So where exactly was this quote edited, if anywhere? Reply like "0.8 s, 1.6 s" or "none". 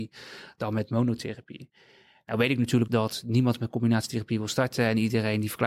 2.9 s